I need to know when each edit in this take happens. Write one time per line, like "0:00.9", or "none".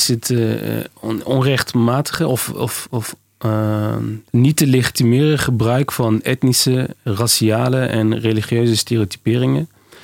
0:04.3

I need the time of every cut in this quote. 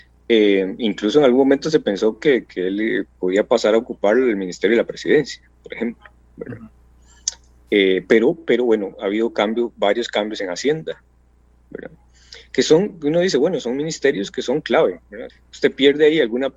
0:15.3

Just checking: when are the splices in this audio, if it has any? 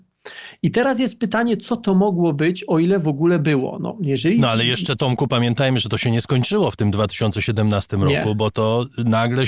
none

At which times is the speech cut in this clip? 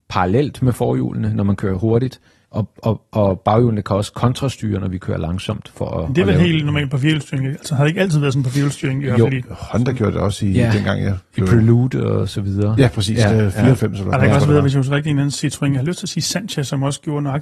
none

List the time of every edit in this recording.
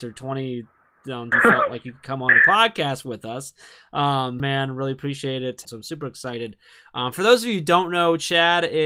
0:01.3
0:04.4
0:05.6

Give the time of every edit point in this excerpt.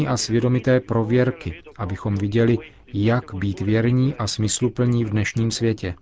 none

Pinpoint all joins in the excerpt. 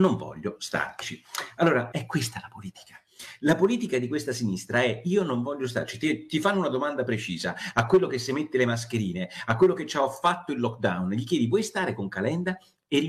0:01.9

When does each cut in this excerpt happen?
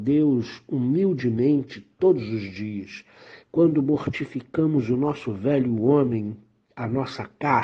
none

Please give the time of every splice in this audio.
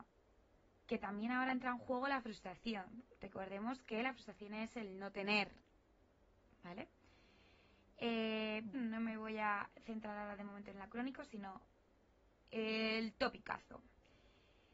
0:08.7

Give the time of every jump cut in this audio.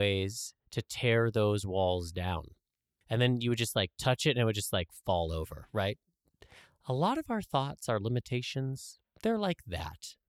0:03.0

